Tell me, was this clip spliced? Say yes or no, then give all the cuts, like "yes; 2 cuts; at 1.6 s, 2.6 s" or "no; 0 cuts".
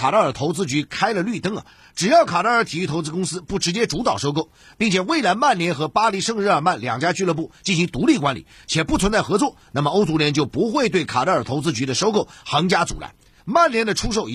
yes; 1 cut; at 13.4 s